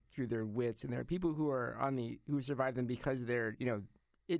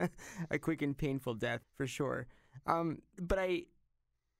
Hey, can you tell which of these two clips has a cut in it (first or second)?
second